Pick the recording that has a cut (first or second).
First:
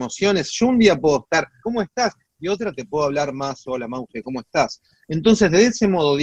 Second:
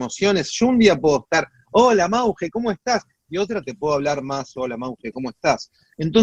first